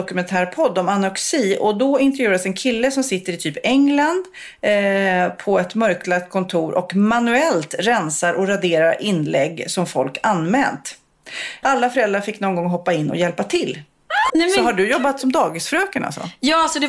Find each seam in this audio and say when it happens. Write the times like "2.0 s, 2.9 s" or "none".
11.6 s, 14.3 s